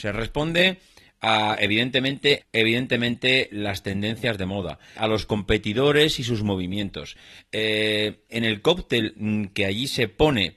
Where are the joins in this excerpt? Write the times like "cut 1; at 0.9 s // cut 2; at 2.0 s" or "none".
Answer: cut 1; at 2.4 s // cut 2; at 5.0 s // cut 3; at 8.3 s

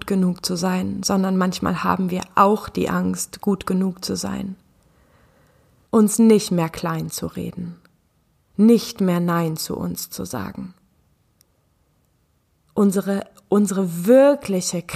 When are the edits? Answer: cut 1; at 5.9 s

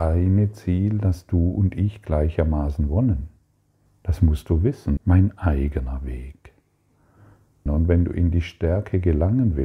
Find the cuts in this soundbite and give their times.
cut 1; at 3.9 s // cut 2; at 5.0 s // cut 3; at 7.7 s

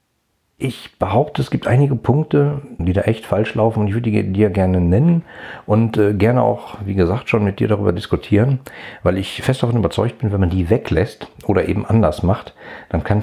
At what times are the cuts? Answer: cut 1; at 2.8 s

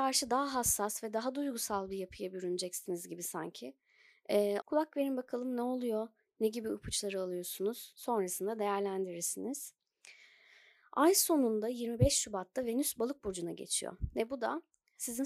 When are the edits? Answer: cut 1; at 4.6 s

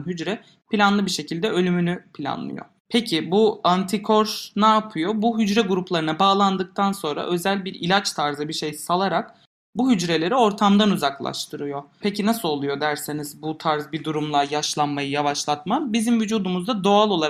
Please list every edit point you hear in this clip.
none

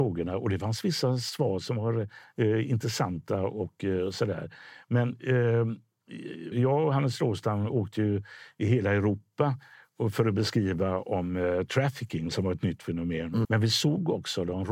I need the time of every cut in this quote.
cut 1; at 6.5 s // cut 2; at 13.4 s

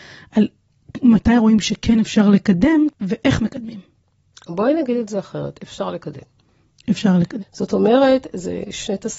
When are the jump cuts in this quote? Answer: cut 1; at 7.4 s

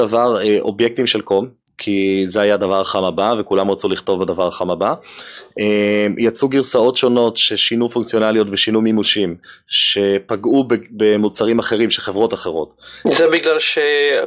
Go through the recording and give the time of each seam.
none

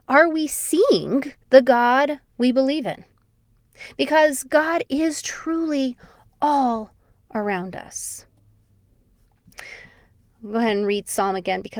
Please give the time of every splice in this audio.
cut 1; at 1.4 s

